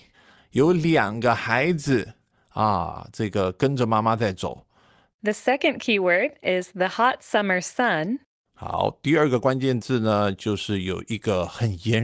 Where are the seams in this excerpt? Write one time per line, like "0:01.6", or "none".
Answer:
0:05.1